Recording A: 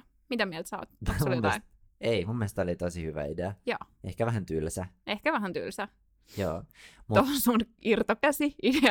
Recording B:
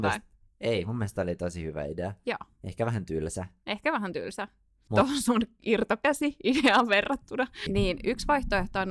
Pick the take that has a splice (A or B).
B